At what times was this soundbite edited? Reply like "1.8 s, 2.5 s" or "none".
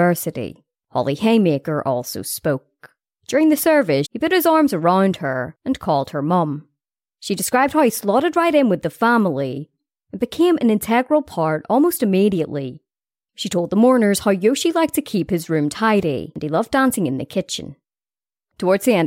4.0 s